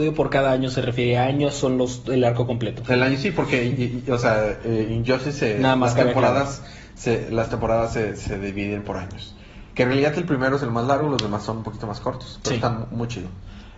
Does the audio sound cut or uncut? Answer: uncut